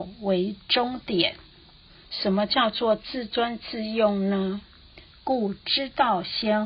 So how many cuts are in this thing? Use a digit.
2